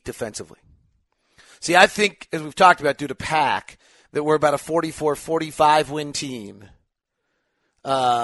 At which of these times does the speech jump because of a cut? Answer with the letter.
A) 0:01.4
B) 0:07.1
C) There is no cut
C